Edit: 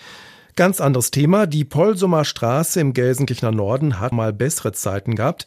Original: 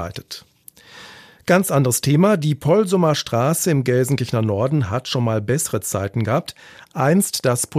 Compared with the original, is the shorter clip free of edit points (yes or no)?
no